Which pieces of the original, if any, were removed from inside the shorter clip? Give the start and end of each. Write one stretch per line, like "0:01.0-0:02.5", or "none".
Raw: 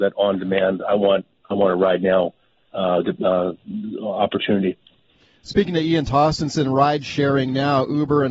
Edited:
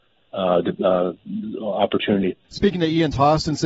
0:04.8-0:05.4